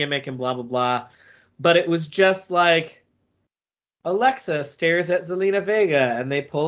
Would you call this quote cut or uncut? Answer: uncut